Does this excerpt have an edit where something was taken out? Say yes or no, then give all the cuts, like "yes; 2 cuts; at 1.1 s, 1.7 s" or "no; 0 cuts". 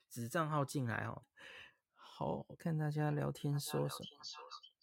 yes; 2 cuts; at 1.2 s, 2.6 s